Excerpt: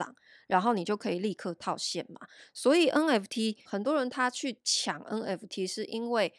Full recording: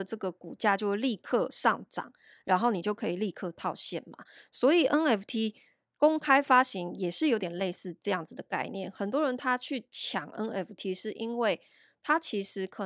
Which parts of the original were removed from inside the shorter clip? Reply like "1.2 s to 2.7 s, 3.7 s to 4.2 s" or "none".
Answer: 5.6 s to 8.9 s

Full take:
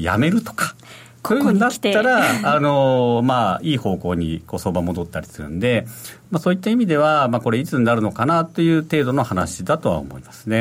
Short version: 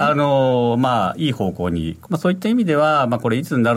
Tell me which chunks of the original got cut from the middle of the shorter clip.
4.5 s to 6.3 s

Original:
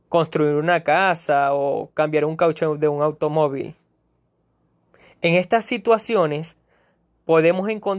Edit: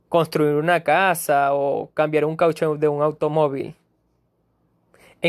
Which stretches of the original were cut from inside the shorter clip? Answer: none

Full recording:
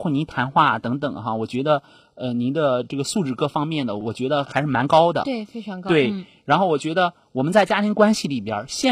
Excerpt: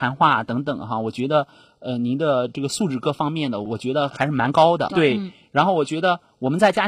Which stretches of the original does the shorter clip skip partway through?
5.2 s to 5.8 s

